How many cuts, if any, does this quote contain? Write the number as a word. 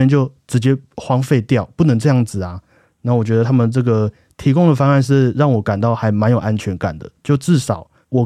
zero